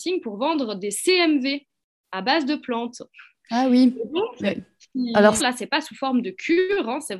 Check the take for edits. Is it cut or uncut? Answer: cut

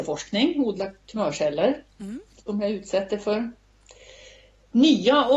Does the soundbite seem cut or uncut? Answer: uncut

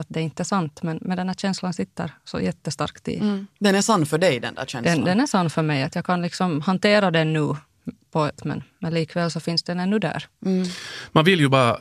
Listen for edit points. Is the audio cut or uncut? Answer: cut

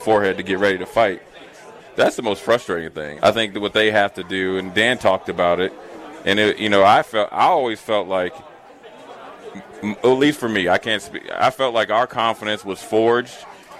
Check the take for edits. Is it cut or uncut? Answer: cut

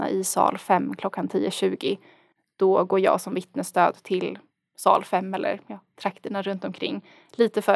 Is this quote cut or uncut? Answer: uncut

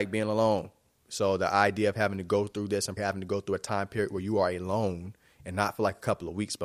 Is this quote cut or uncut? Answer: cut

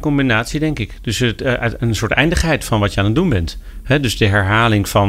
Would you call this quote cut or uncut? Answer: uncut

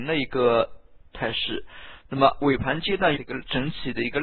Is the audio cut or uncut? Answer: cut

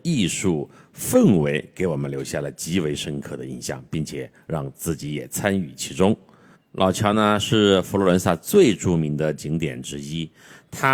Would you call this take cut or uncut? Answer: cut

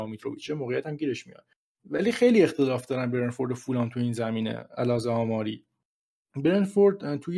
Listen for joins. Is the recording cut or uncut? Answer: uncut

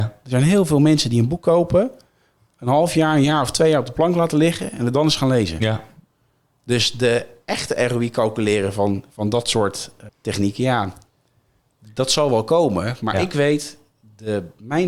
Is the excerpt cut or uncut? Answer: cut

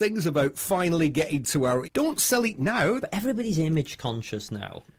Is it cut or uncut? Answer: cut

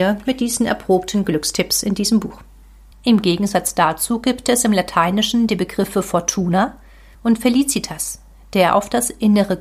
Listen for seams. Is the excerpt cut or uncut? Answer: cut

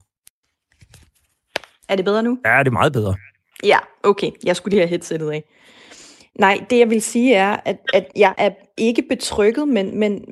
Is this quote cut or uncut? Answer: uncut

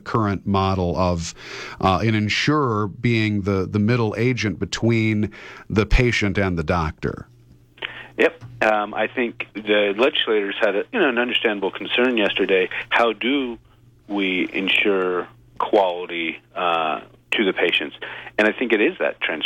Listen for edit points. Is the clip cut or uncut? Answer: uncut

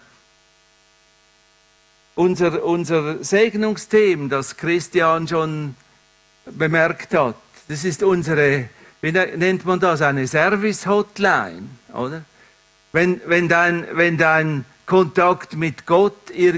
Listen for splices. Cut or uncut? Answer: uncut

